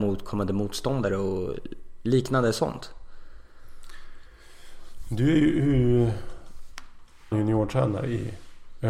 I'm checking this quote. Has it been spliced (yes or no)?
yes